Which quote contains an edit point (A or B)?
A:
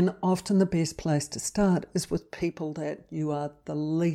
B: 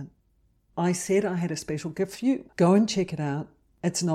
B